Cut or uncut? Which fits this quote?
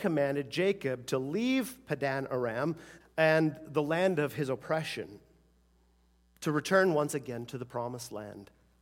cut